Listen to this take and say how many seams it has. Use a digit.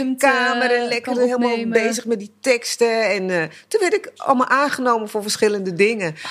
0